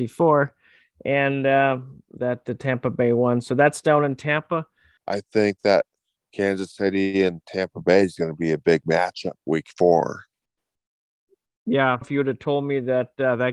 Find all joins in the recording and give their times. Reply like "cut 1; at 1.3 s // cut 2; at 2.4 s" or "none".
cut 1; at 5.0 s // cut 2; at 9.4 s // cut 3; at 12.0 s